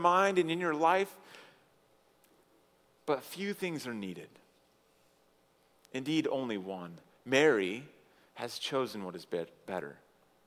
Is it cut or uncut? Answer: uncut